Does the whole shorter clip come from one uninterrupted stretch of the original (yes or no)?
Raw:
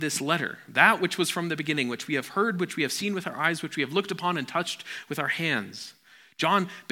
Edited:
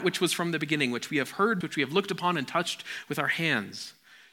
no